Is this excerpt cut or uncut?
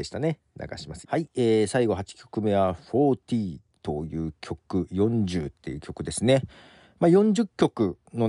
cut